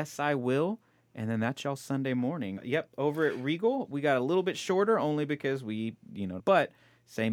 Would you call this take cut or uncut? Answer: cut